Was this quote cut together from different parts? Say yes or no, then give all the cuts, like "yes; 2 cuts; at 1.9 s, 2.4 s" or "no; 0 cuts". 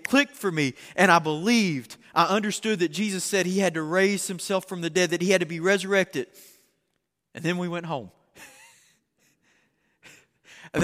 no; 0 cuts